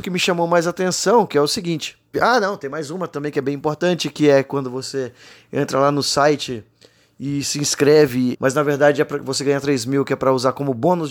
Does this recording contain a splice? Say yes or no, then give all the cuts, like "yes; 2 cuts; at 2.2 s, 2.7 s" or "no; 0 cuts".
yes; 2 cuts; at 2.1 s, 8.3 s